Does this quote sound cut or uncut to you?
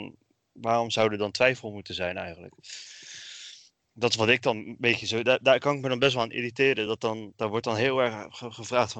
uncut